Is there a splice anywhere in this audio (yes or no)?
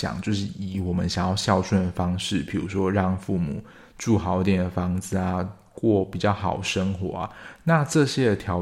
no